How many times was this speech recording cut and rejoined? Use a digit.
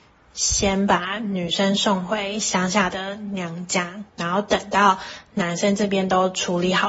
1